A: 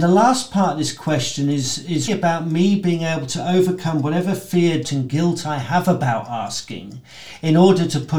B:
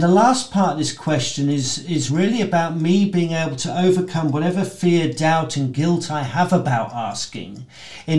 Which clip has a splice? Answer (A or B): A